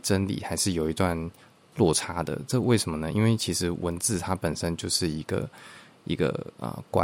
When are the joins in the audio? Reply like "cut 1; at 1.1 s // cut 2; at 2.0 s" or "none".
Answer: none